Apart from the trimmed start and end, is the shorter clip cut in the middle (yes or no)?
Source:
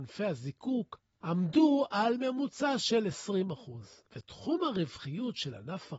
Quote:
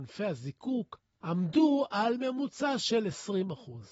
no